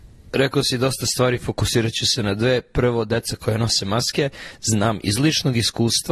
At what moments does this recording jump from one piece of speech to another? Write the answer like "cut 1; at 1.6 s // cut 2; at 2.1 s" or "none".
none